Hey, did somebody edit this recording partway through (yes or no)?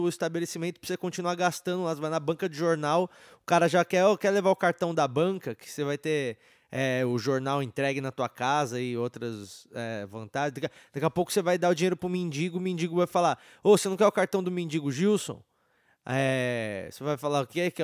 no